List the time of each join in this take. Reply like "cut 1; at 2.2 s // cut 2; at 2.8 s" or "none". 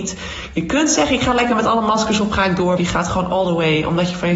cut 1; at 2.8 s